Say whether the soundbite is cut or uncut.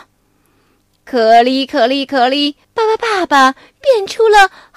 cut